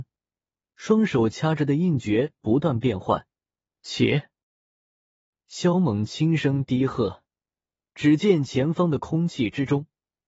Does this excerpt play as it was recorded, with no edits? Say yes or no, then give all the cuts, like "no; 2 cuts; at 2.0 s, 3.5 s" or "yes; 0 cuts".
no; 1 cut; at 3.7 s